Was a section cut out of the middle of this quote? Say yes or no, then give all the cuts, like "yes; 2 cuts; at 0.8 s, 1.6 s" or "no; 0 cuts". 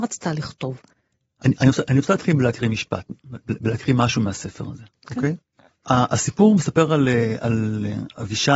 no; 0 cuts